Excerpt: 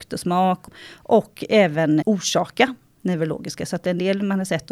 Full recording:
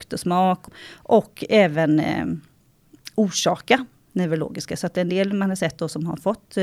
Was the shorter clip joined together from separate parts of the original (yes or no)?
yes